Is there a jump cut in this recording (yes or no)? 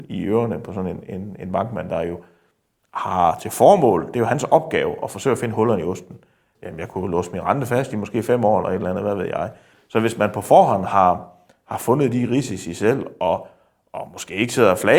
yes